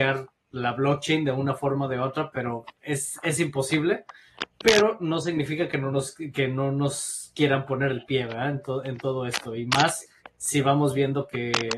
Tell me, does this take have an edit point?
no; 0 cuts

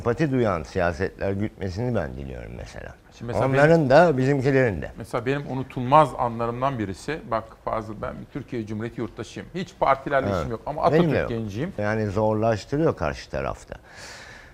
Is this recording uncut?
no; 1 cut; at 11.8 s

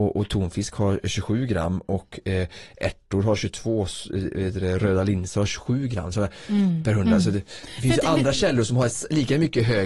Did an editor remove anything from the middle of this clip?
no; 0 cuts

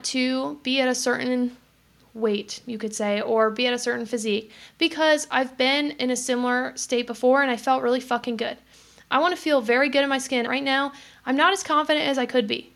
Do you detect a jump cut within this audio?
yes; 1 cut; at 10.5 s

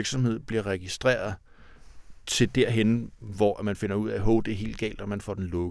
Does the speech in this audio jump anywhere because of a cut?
no; 0 cuts

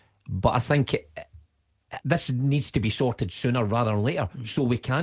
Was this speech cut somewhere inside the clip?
yes; 1 cut; at 2.0 s

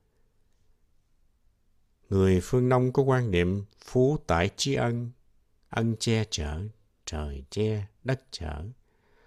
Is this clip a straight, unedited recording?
yes; 0 cuts

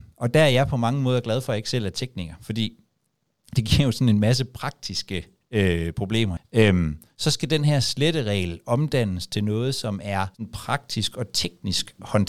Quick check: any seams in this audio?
yes; 2 cuts; at 6.4 s, 10.3 s

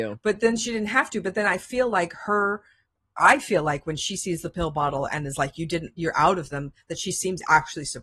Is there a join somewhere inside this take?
no; 0 cuts

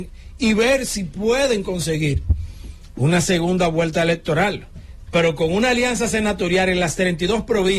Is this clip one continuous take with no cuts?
yes; 0 cuts

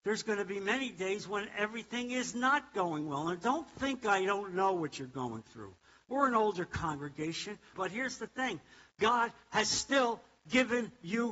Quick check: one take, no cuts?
no; 2 cuts; at 6.1 s, 7.7 s

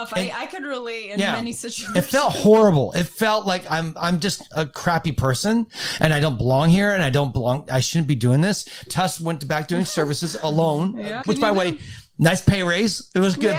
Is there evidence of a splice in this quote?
yes; 2 cuts; at 8.9 s, 11.2 s

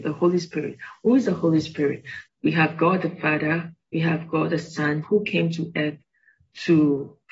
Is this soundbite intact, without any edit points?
no; 3 cuts; at 2.3 s, 3.8 s, 5.0 s

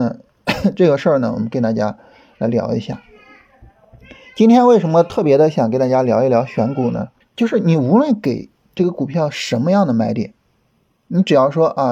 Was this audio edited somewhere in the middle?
yes; 1 cut; at 7.2 s

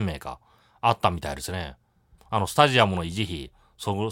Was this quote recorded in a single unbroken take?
no; 1 cut; at 2.2 s

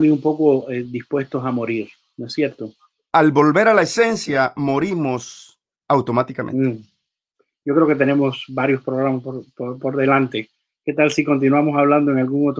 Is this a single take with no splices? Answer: no; 1 cut; at 3.1 s

